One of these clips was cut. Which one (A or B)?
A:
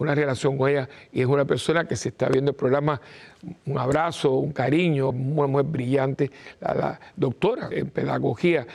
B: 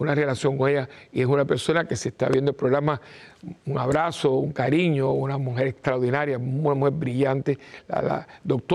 A